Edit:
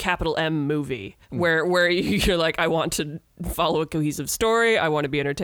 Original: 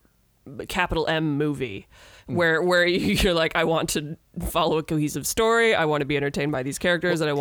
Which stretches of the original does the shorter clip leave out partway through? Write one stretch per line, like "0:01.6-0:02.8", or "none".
0:01.9-0:02.2